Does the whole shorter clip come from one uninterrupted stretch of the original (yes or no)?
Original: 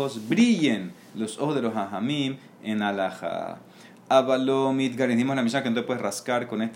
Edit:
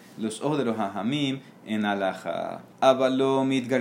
no